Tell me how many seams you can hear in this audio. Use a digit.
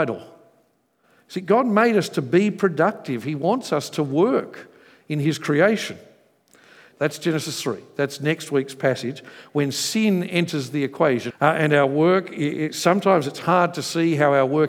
2